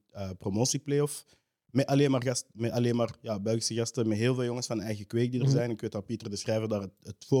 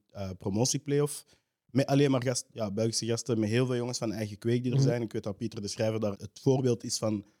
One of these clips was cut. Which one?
second; 2 cuts; at 2.5 s, 6.1 s

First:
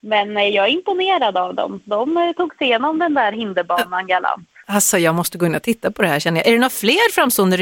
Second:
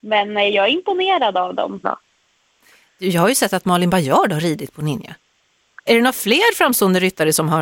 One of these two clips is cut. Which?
second; 2 cuts; at 1.8 s, 5.9 s

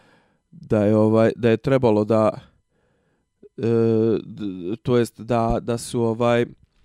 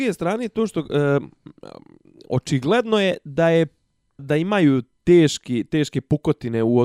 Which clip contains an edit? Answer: second; 1 cut; at 4.2 s

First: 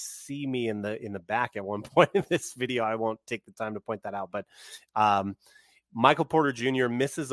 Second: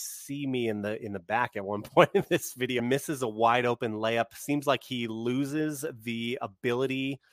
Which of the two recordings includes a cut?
second; 1 cut; at 2.8 s

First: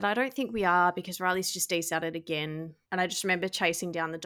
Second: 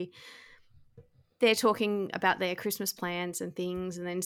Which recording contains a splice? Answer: first; 1 cut; at 2.8 s

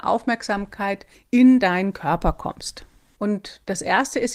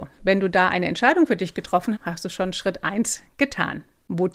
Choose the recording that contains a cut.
second; 1 cut; at 1.9 s

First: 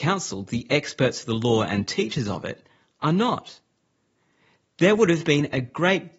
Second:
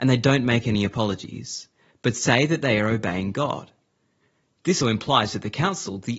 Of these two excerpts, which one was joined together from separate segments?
second; 1 cut; at 4.8 s

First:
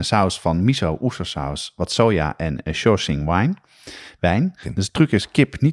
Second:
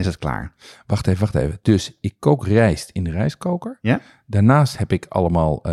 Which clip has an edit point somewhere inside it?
first; 1 cut; at 4.6 s

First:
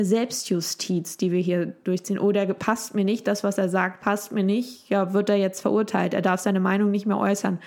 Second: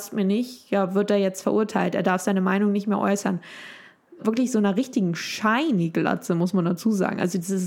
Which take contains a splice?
second; 1 cut; at 4.2 s

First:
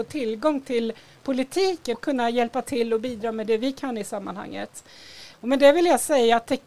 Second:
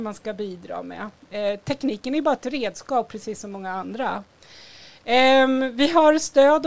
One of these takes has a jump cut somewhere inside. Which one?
first; 2 cuts; at 1.9 s, 5.3 s

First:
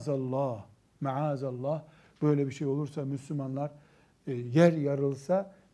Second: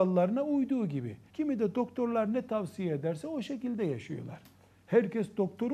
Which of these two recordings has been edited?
second; 1 cut; at 1.3 s

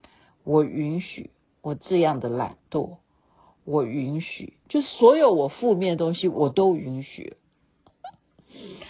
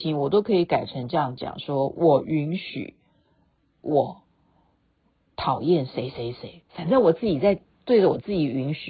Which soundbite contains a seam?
first; 1 cut; at 7.8 s

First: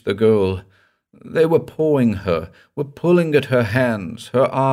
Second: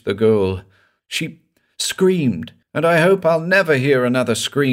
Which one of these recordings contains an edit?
second; 2 cuts; at 1.0 s, 2.6 s

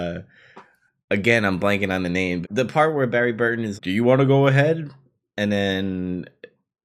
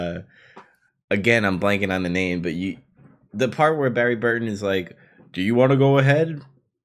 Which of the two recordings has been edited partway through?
first; 2 cuts; at 2.4 s, 3.8 s

